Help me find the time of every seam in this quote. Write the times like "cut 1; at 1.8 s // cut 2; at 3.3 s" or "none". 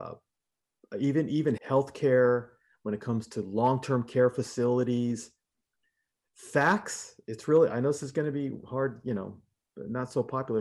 cut 1; at 1.6 s